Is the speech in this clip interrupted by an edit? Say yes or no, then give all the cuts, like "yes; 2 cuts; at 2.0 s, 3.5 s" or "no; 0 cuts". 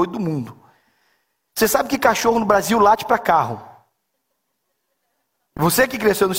no; 0 cuts